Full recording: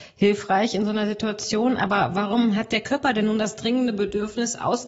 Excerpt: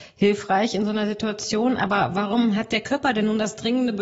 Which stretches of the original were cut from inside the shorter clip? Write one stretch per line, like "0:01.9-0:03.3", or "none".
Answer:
none